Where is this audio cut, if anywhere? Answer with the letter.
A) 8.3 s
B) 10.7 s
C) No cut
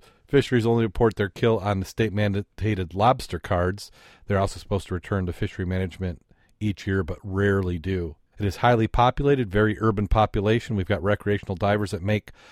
A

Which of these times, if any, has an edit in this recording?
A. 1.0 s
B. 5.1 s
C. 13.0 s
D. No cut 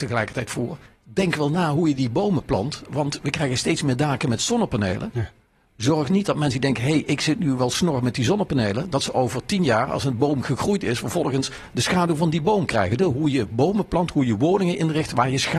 C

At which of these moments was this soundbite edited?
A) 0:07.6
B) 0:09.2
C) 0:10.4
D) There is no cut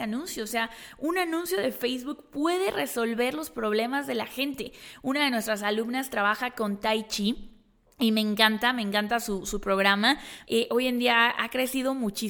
C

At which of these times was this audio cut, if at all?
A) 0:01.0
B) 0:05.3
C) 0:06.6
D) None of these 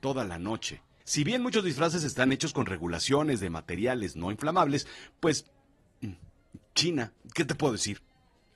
A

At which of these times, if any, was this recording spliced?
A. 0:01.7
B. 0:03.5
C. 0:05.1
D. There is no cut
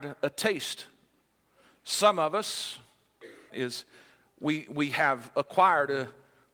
B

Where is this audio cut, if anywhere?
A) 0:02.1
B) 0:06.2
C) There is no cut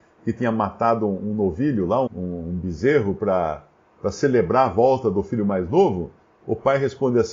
A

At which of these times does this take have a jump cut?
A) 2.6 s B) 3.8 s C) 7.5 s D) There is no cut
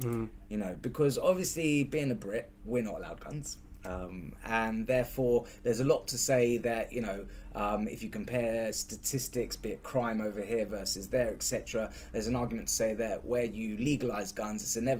A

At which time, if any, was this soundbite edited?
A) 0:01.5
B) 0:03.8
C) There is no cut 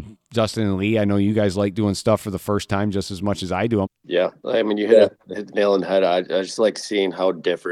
B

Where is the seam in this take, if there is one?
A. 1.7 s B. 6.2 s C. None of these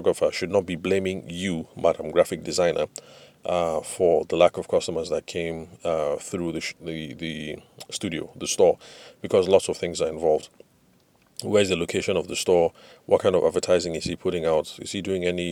C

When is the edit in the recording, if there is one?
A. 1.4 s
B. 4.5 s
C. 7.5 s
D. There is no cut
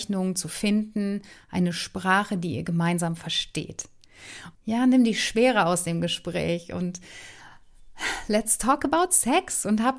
B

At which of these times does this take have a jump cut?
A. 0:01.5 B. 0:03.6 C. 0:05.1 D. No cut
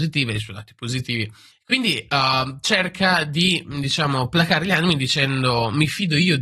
A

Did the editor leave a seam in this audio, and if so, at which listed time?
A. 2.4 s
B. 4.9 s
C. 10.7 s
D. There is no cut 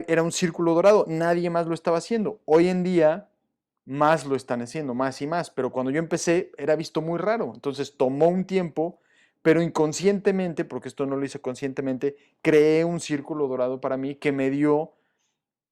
D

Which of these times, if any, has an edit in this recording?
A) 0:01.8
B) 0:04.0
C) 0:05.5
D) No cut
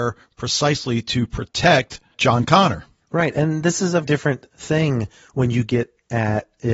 B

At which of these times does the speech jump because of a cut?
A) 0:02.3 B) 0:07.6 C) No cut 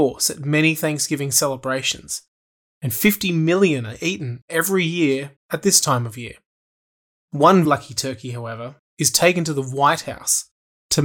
B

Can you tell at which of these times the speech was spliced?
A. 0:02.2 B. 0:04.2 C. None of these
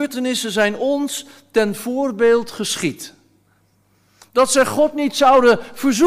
B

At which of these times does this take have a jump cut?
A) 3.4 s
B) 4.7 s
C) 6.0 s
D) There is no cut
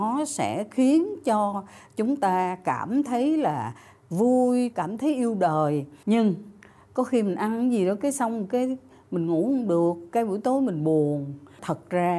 B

